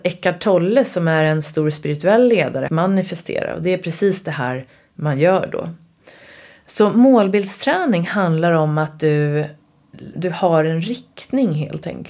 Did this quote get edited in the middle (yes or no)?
yes